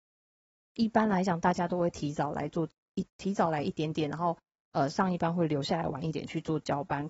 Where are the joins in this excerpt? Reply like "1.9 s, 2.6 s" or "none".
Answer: 6.1 s